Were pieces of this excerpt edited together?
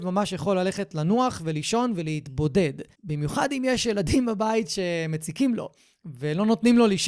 yes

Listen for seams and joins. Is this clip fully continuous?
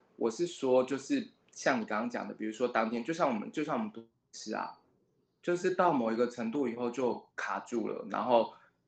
no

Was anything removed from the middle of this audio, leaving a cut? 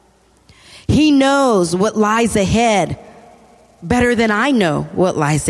no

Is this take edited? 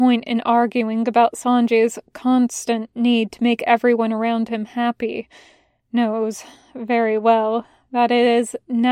no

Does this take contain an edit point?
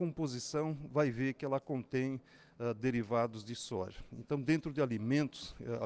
no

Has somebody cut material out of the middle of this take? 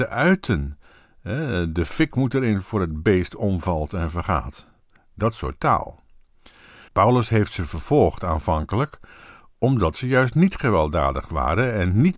yes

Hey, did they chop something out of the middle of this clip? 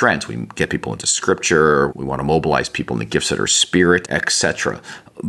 yes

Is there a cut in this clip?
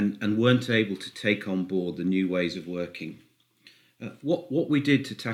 no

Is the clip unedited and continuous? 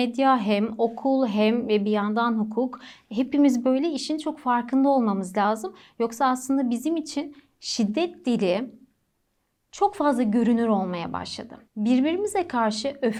no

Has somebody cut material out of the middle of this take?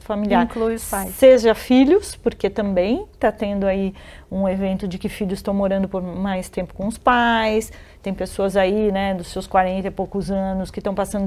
no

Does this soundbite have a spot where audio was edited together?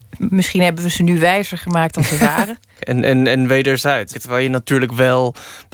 yes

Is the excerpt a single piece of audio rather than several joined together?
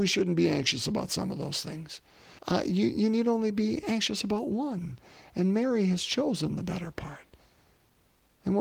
no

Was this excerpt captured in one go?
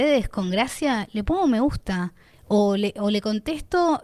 yes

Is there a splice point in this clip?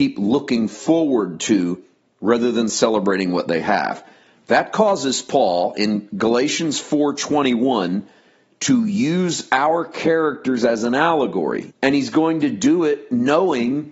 yes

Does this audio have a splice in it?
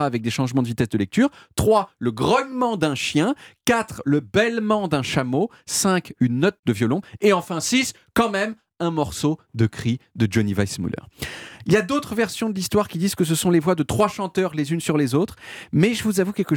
no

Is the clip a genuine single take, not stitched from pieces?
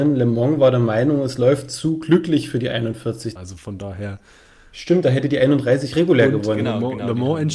no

